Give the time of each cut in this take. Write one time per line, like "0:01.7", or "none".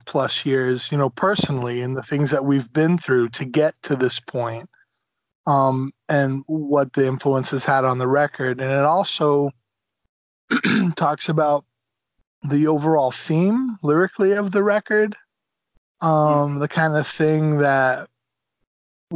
none